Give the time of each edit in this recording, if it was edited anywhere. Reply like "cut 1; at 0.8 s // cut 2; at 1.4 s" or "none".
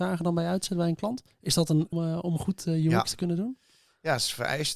cut 1; at 1.9 s

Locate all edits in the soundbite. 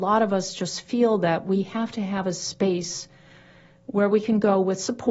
none

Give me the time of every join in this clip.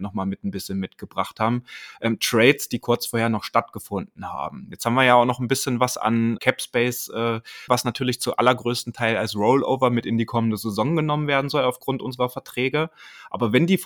cut 1; at 6.4 s // cut 2; at 7.7 s

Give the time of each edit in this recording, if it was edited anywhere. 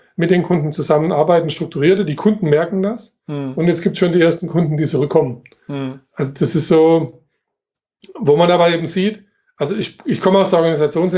none

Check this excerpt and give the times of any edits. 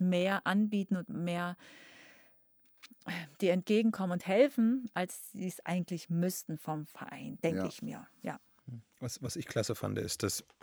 none

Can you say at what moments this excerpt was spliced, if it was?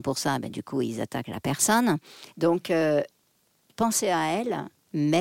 cut 1; at 2.3 s

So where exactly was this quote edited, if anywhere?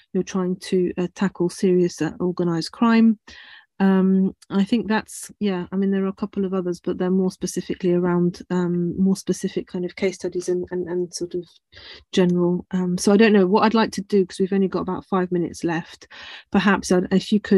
none

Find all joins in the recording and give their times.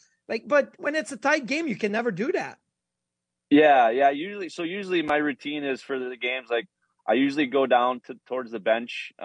none

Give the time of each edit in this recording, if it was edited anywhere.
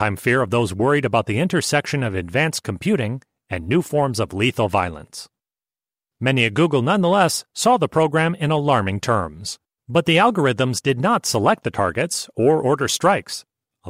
cut 1; at 9.8 s

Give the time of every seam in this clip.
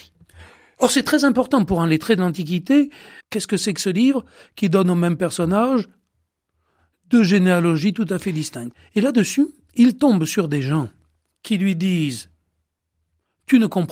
cut 1; at 3.2 s

